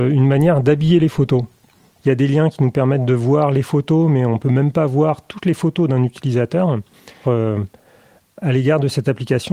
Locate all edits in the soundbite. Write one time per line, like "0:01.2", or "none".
0:02.0
0:07.2